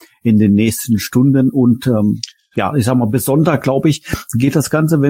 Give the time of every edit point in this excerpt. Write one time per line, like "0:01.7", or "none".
none